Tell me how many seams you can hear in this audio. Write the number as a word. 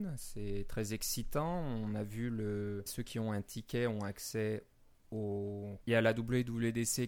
two